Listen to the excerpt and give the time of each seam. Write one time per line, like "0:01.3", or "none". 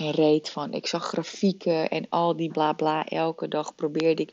0:02.5